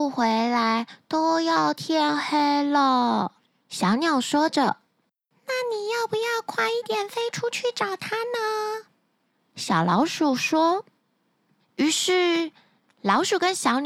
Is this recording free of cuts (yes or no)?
yes